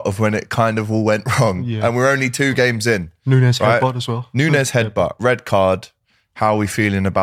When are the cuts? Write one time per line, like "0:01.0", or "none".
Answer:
none